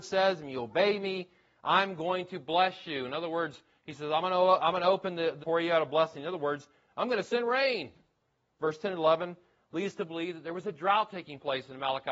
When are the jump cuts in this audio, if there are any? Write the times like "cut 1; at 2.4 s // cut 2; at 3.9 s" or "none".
cut 1; at 5.4 s // cut 2; at 8.6 s